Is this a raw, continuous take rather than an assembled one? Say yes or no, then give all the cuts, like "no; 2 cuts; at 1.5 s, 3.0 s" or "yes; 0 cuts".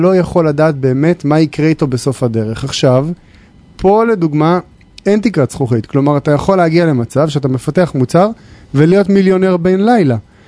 yes; 0 cuts